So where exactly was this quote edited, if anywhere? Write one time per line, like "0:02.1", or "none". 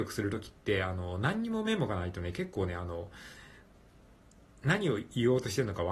none